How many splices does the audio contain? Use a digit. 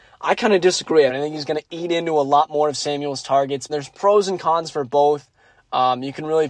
2